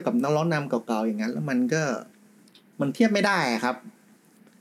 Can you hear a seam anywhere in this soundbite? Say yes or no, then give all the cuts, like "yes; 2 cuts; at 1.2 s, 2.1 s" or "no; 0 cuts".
no; 0 cuts